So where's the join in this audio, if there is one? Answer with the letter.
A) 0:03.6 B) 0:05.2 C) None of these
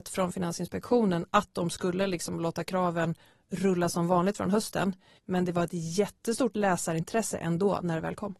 B